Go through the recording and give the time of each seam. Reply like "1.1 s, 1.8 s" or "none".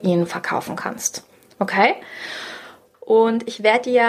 2.9 s